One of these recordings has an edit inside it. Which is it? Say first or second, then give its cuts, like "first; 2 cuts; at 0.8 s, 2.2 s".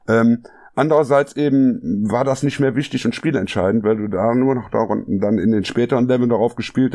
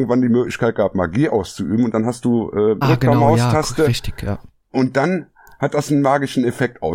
second; 1 cut; at 2.8 s